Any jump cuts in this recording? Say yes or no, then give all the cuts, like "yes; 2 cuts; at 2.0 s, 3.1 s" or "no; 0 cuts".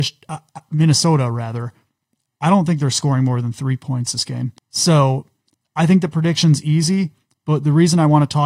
yes; 1 cut; at 4.6 s